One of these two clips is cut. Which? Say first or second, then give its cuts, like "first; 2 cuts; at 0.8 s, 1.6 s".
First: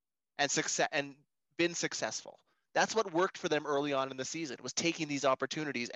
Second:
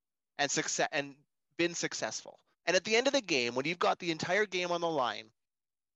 second; 1 cut; at 2.5 s